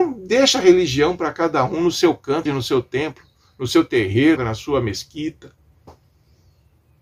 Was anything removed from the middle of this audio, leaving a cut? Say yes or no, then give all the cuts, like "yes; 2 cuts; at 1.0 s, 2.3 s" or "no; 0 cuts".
yes; 2 cuts; at 2.5 s, 4.4 s